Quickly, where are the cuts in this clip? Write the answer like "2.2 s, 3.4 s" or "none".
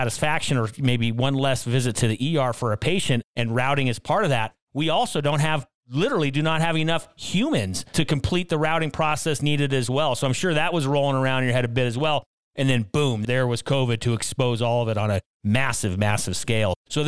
none